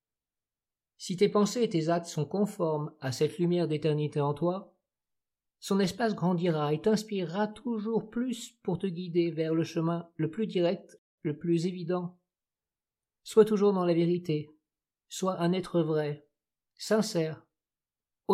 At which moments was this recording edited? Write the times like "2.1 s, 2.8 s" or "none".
11.2 s